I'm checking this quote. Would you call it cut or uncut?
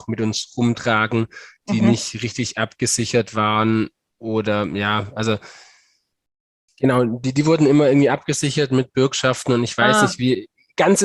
cut